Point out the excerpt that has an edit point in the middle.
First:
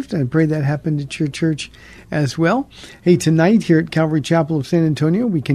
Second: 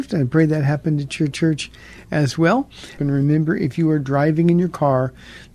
second; 1 cut; at 3.0 s

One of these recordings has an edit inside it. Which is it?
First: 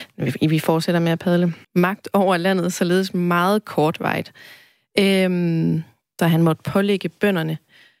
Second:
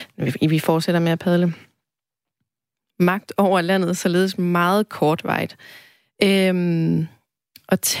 first; 2 cuts; at 1.6 s, 6.2 s

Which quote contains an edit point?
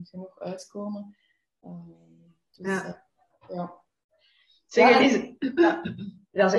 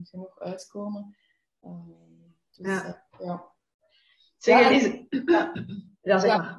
second; 1 cut; at 3.1 s

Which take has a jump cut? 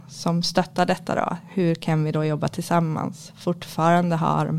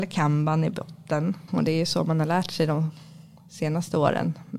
second; 1 cut; at 1.5 s

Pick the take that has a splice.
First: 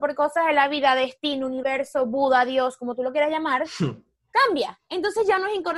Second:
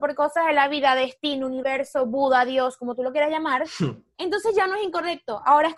second; 1 cut; at 4.1 s

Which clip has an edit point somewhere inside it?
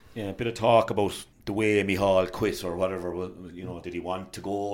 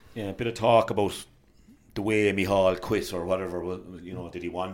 first; 1 cut; at 1.3 s

